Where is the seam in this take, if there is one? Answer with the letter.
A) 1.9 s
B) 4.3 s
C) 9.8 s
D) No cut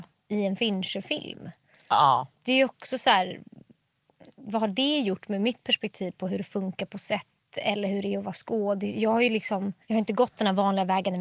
C